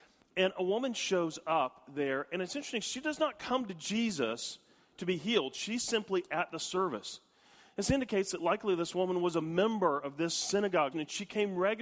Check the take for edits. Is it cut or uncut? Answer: cut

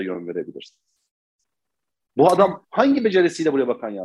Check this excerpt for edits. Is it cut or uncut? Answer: uncut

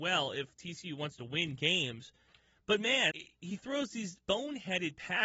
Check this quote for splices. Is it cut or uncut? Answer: cut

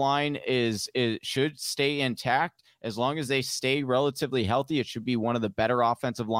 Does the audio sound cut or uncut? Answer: uncut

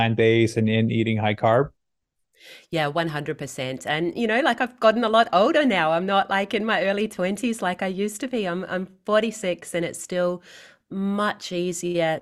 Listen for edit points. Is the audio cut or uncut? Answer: uncut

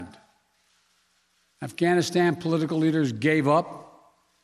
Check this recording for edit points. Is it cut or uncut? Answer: uncut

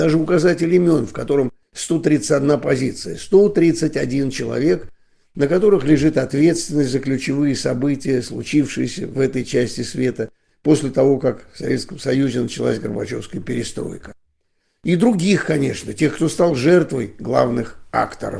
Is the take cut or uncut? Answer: uncut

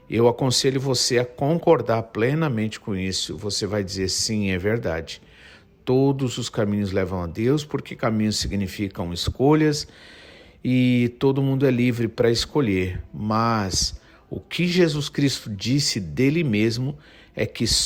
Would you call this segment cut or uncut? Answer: uncut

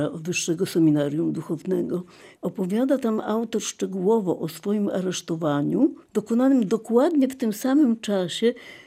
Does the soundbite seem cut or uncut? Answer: cut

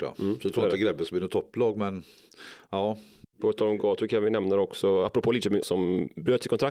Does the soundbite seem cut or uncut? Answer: cut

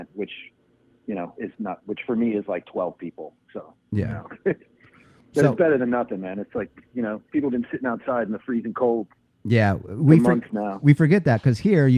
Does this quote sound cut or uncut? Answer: uncut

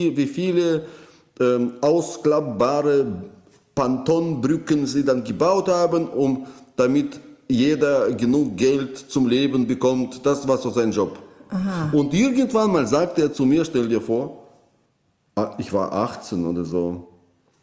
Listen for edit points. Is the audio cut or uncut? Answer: uncut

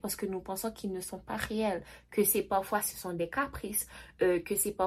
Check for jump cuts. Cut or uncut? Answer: uncut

